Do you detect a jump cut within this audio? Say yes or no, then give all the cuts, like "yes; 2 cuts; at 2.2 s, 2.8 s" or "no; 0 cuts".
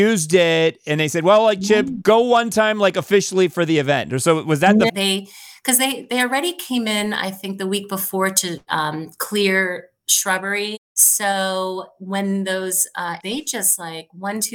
yes; 2 cuts; at 4.9 s, 13.2 s